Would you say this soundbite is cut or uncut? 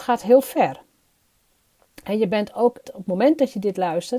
cut